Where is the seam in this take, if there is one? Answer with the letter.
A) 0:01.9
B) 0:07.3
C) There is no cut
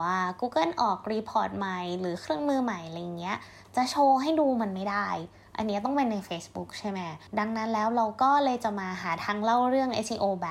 B